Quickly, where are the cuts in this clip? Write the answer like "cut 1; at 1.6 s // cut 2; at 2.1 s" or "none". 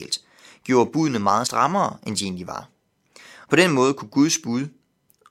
cut 1; at 3.5 s